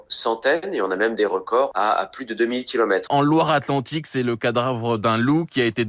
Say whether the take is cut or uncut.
cut